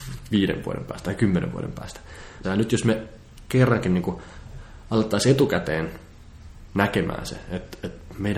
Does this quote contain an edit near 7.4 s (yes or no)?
no